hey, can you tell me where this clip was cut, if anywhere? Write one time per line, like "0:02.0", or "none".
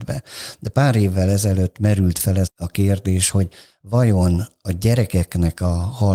0:02.5